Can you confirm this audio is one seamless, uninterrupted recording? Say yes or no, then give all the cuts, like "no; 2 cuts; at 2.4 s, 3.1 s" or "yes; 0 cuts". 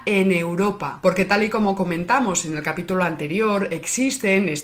yes; 0 cuts